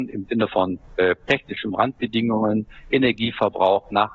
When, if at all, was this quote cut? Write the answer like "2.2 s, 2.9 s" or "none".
none